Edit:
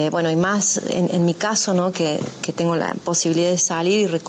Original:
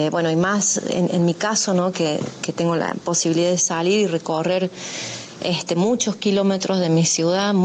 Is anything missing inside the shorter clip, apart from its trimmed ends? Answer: no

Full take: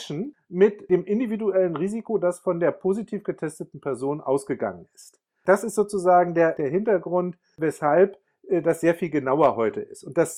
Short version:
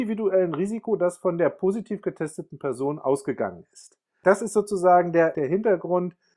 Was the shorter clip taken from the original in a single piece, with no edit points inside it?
yes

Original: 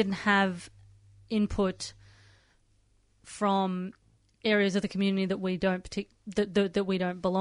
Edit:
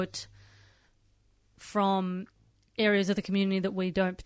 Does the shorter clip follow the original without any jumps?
yes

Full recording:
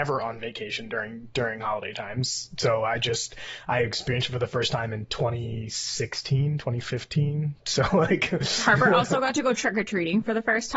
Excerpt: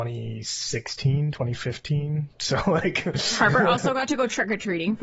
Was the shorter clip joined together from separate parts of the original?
no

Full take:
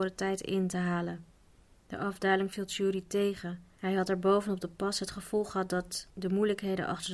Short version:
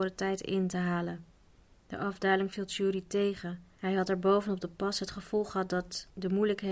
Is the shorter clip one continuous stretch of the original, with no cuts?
yes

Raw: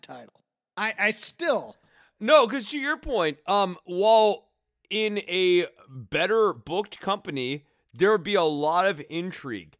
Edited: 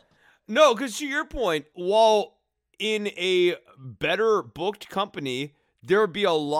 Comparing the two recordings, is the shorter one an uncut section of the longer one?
no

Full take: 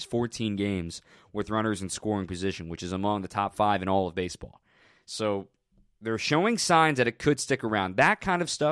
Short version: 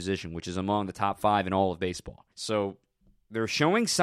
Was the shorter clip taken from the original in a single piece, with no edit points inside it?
no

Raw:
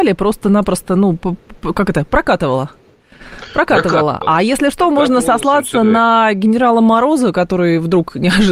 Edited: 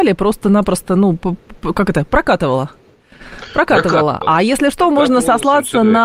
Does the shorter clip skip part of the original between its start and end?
no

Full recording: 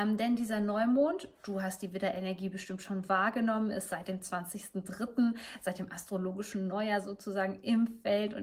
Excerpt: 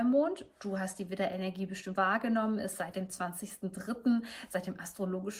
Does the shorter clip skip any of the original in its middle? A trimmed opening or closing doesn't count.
yes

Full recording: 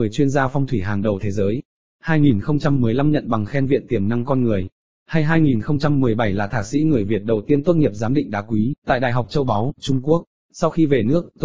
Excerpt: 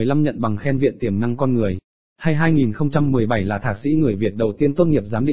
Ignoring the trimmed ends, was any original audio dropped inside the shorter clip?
no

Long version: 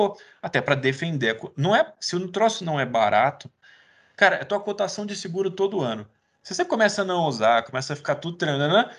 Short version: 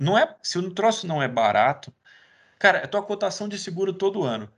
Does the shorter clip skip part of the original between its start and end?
no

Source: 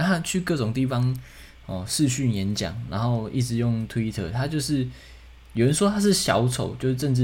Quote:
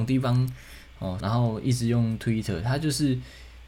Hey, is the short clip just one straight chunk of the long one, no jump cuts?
no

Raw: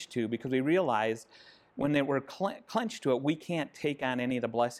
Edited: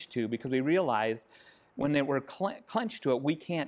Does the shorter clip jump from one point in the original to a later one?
no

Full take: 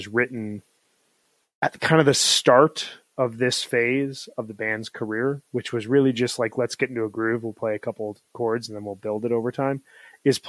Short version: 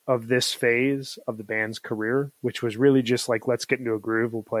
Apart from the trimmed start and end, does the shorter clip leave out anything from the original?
no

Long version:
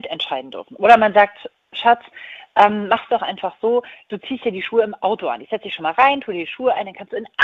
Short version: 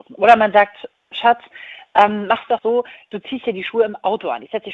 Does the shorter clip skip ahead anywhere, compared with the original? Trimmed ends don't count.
yes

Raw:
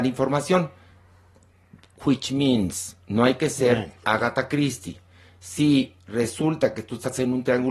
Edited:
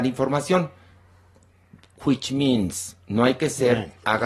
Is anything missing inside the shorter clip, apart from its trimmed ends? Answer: no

